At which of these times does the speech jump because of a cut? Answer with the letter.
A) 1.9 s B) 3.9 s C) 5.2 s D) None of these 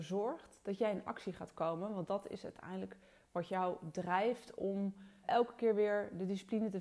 C